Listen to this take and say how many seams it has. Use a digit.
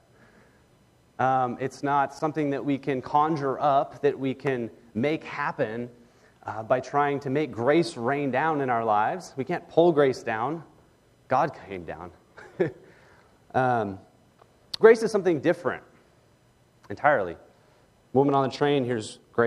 2